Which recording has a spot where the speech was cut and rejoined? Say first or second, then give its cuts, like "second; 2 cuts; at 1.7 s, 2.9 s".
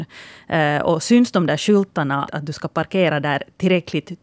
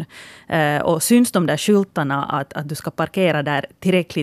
first; 1 cut; at 2.3 s